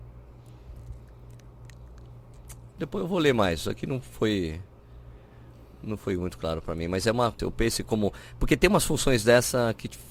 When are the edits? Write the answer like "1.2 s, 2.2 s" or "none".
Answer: 2.8 s, 7.4 s

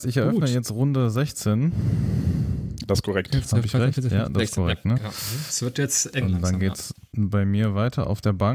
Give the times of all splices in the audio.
5.0 s

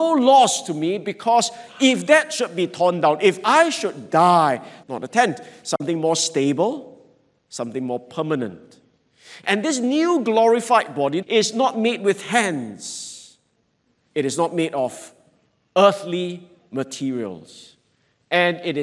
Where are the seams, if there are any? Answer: 4.8 s, 11.2 s

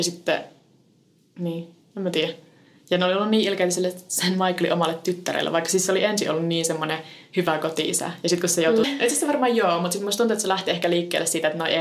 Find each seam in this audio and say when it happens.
8.8 s

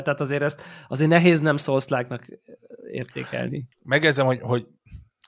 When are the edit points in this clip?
3.7 s

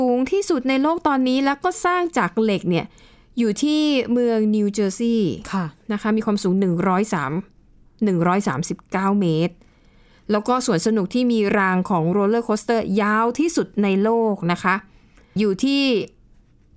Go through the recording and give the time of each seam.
15.4 s

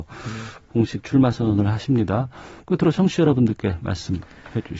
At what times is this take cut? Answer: none

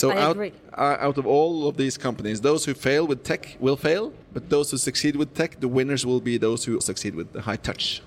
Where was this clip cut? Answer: 4.2 s, 6.8 s

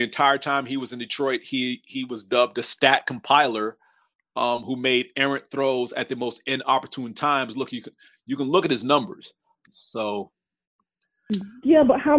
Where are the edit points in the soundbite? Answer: 9.7 s

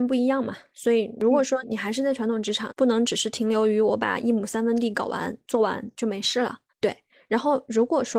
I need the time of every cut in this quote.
1.6 s, 2.7 s, 6.7 s

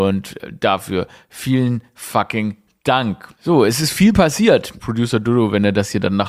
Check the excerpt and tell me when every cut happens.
3.3 s, 4.8 s

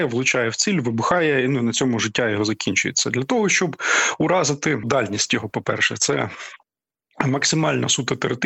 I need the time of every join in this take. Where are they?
4.8 s

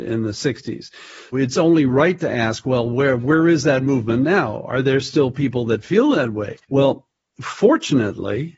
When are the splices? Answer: 1.3 s, 6.6 s

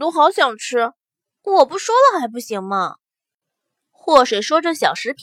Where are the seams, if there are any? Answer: 1.4 s

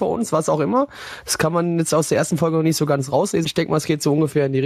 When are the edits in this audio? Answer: 3.4 s

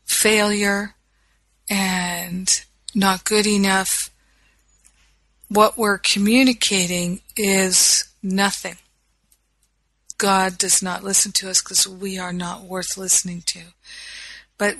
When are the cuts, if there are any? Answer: 10.1 s

